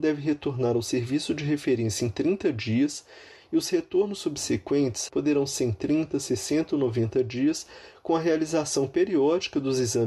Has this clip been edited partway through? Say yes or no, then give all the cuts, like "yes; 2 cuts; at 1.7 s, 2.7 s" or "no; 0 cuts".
yes; 1 cut; at 5.1 s